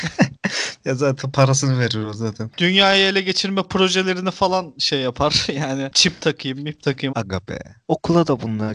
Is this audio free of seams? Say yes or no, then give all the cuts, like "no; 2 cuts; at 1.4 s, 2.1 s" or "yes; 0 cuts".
no; 1 cut; at 7.1 s